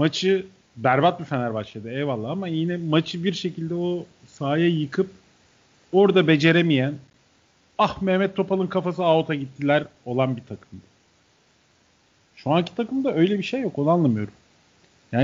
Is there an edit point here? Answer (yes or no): no